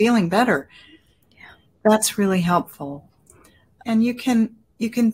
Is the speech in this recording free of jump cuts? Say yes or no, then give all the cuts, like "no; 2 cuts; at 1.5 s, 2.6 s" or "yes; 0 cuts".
no; 2 cuts; at 1.2 s, 3.8 s